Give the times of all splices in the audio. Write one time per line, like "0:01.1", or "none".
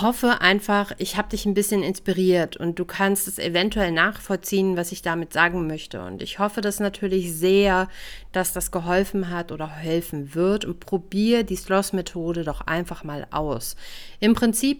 none